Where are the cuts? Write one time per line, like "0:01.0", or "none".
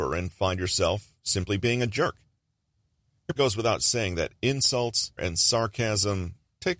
0:03.4
0:05.2

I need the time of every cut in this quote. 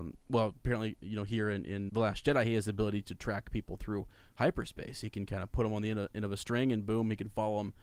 0:01.9

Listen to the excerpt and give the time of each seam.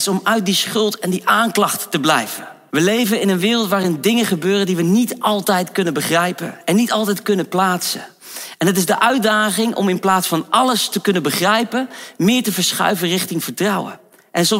0:02.7

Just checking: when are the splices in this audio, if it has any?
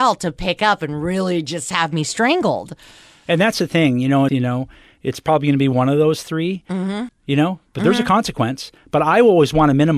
0:04.3
0:07.1

